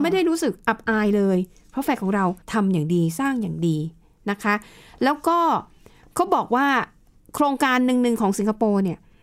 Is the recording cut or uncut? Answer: cut